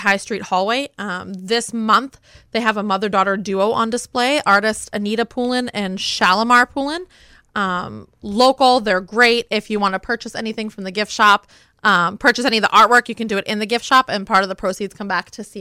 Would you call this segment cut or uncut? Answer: uncut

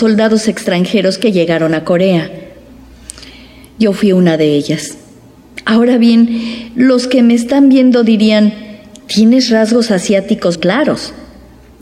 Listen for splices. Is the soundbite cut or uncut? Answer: cut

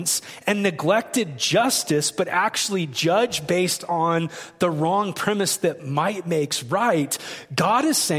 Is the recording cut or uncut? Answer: uncut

